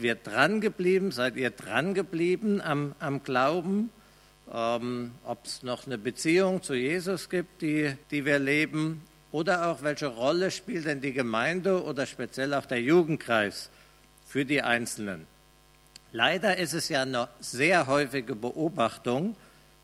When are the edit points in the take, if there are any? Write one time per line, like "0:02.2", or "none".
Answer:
0:08.0